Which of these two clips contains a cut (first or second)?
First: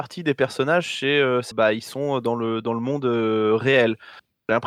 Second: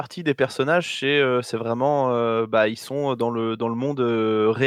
first